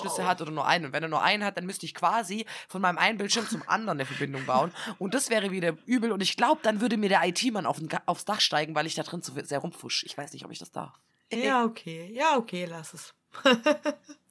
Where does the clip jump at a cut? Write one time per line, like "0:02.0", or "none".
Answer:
none